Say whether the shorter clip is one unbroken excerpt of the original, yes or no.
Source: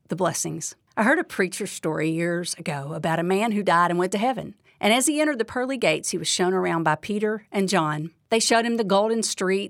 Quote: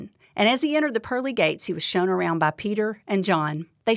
yes